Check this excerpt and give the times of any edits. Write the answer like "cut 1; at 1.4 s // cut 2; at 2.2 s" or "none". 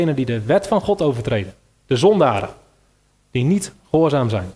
none